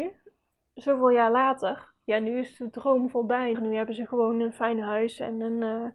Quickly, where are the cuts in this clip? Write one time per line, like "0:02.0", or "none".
0:03.5